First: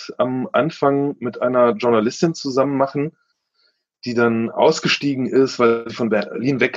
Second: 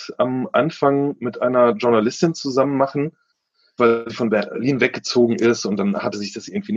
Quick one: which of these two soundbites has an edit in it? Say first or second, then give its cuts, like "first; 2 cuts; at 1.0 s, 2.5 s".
second; 1 cut; at 3.8 s